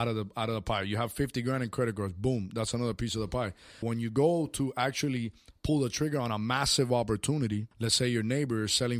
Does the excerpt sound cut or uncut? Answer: cut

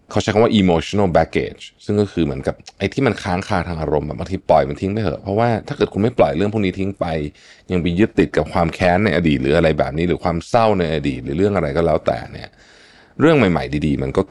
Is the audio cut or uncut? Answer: uncut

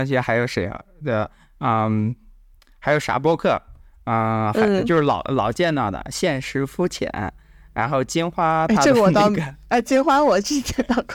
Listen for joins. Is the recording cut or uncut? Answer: uncut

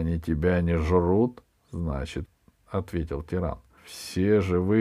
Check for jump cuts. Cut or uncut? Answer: cut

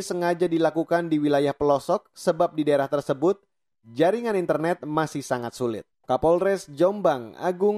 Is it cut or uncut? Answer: cut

